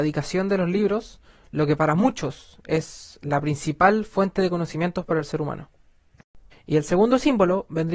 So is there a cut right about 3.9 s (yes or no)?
no